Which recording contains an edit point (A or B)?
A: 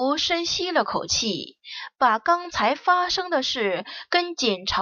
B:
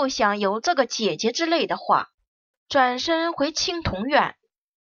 B